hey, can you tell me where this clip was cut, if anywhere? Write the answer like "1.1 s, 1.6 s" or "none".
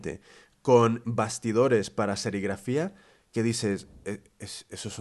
1.0 s